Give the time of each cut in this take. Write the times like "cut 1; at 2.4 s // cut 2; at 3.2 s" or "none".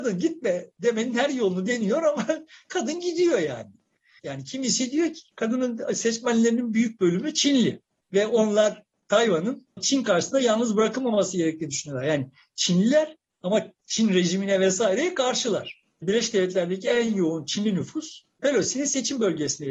cut 1; at 4.2 s